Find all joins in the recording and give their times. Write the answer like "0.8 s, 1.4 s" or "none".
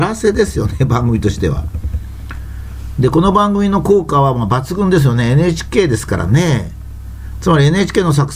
7.4 s